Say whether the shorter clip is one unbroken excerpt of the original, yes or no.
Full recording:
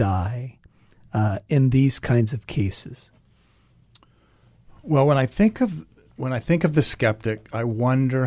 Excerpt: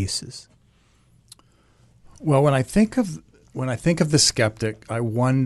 yes